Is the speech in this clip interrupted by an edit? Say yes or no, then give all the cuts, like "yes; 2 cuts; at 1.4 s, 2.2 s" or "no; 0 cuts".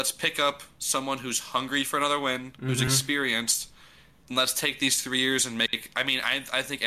no; 0 cuts